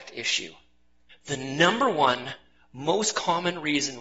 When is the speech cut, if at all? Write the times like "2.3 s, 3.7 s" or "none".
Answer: 1.1 s